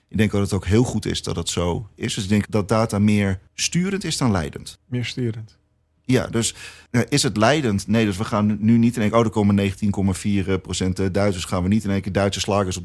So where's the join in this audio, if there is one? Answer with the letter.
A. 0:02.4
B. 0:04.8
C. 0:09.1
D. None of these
A